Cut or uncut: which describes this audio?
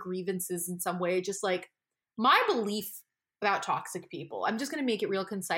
uncut